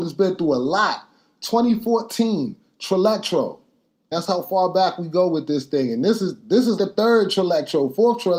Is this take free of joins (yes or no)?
no